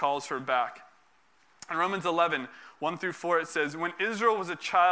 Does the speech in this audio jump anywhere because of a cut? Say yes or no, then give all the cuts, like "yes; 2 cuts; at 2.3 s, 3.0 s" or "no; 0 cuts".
no; 0 cuts